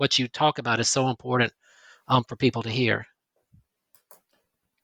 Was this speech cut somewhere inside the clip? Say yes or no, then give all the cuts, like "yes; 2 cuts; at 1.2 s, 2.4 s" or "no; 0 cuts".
no; 0 cuts